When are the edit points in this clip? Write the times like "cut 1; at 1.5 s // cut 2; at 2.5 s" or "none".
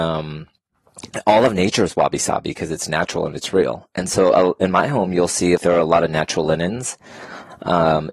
cut 1; at 5.6 s